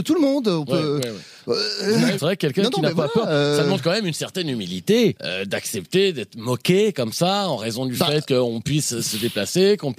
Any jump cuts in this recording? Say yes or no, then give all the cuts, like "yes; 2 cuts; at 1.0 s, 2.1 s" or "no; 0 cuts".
yes; 1 cut; at 2.2 s